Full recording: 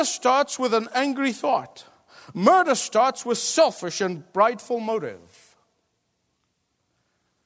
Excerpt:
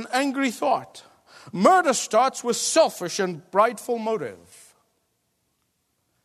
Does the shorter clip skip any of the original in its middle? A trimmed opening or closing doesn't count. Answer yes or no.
no